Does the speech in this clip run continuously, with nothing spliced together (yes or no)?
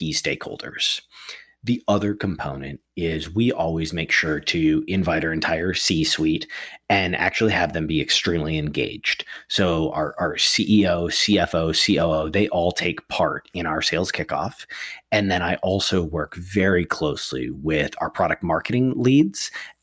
yes